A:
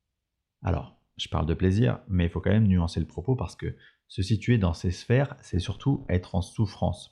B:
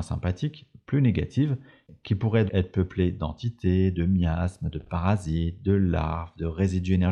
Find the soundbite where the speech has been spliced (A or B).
B